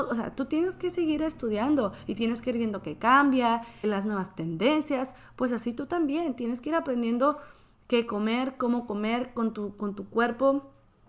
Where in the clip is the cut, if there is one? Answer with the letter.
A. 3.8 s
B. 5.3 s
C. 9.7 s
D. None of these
A